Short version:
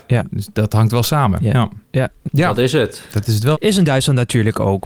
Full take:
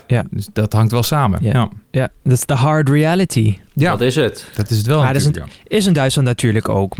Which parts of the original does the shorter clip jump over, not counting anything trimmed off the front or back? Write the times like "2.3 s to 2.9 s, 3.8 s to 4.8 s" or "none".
2.2 s to 3.7 s, 5.0 s to 5.6 s